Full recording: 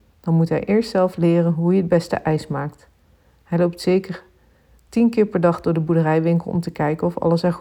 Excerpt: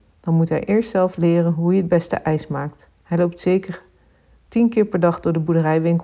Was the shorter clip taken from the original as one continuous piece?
no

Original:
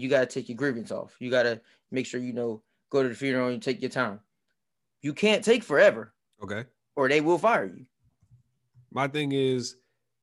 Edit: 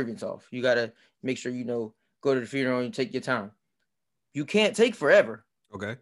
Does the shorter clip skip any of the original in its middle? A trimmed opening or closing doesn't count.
no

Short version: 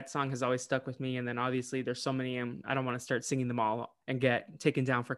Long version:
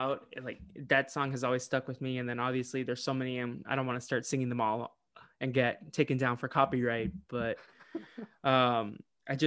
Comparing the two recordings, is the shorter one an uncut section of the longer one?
no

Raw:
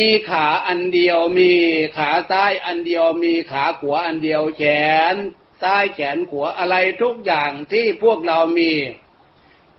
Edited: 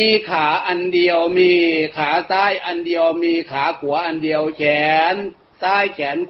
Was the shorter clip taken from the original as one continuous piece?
yes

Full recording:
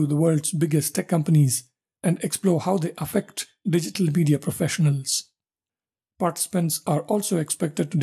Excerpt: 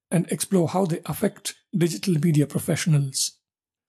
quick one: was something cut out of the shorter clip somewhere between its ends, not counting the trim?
no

